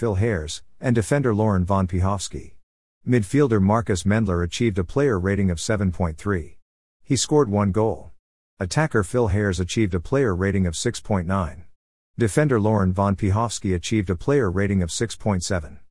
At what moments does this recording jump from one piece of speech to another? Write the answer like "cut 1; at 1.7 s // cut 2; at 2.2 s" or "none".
none